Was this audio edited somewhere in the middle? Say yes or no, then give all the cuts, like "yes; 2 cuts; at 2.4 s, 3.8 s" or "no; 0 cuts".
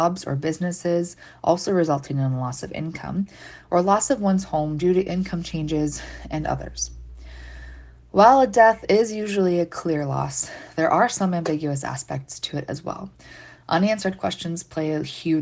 no; 0 cuts